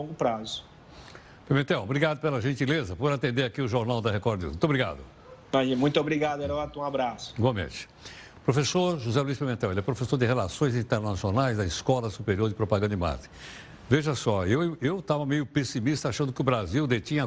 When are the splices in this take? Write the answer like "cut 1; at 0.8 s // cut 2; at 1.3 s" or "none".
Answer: none